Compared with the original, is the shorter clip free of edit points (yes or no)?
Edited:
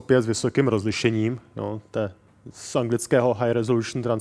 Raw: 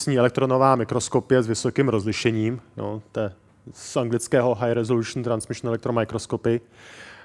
yes